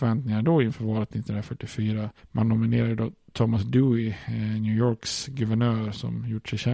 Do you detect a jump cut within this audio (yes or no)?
no